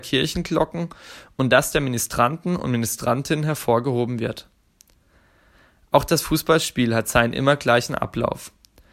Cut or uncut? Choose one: uncut